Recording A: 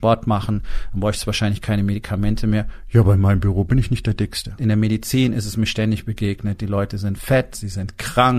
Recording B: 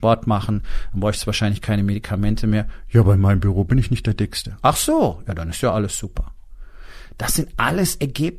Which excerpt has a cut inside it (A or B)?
A